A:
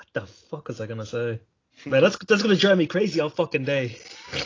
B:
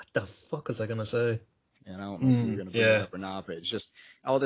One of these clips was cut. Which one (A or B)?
B